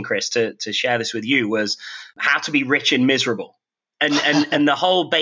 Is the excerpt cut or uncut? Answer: uncut